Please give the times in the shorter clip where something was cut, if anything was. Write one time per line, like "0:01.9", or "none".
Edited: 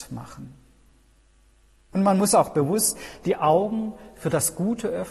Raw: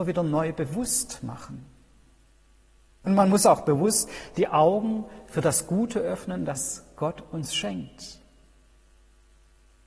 none